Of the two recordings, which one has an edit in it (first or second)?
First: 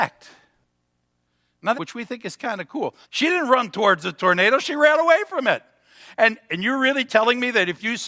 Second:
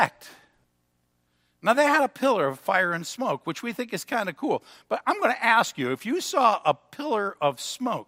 first